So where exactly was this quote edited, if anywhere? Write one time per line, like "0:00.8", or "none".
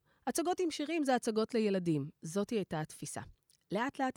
none